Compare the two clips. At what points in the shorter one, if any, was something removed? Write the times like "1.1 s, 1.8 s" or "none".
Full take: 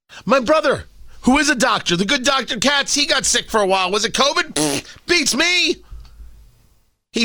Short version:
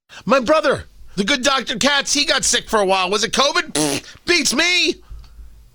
1.2 s

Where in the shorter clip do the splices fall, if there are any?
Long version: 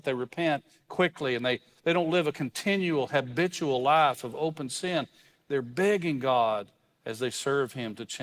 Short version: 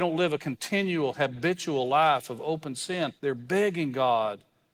3.2 s

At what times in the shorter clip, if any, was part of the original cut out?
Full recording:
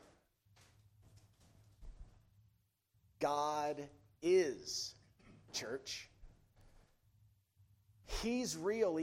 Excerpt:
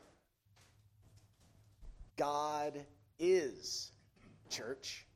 2.1 s

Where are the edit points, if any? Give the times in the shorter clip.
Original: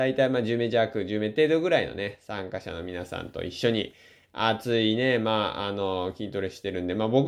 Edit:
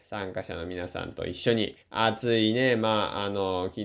1.8 s

